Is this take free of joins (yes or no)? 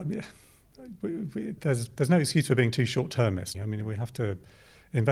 no